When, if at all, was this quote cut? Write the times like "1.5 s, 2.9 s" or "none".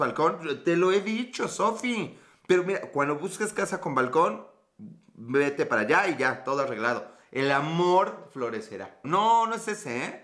9.0 s